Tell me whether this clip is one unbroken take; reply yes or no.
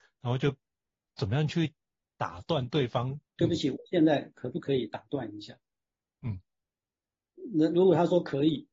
no